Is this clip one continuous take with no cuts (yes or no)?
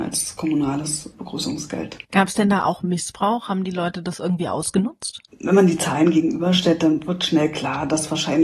no